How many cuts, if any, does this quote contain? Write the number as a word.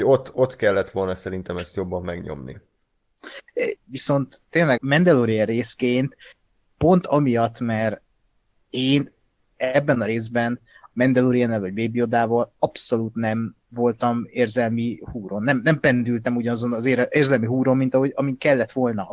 two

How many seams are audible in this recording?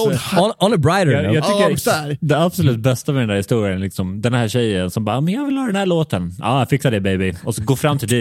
one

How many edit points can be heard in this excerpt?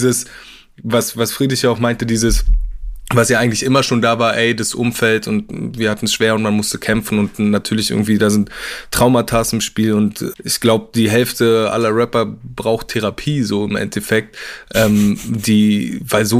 one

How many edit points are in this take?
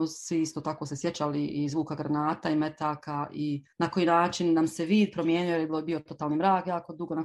one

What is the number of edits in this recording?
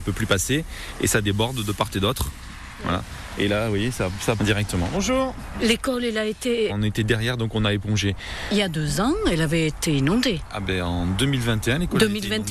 two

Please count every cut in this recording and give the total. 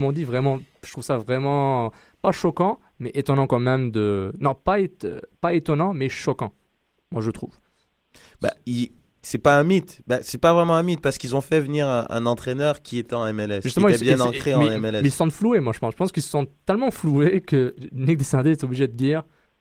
zero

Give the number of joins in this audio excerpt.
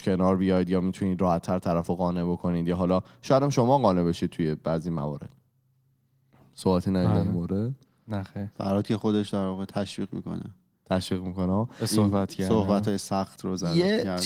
zero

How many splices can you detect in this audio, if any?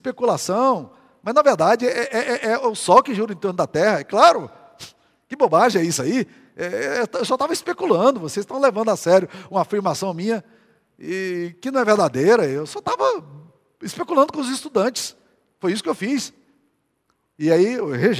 zero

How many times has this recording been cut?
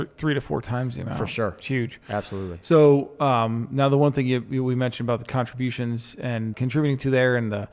one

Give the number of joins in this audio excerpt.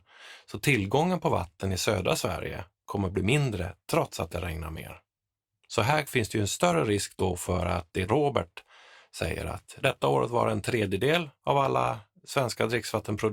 zero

